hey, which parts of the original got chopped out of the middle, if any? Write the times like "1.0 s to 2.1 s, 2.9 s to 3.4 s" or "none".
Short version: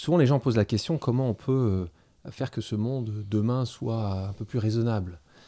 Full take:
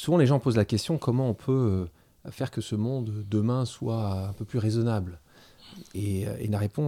none